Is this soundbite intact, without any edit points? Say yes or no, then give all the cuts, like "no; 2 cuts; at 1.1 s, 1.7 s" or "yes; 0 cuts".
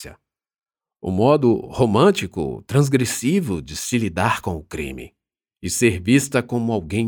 yes; 0 cuts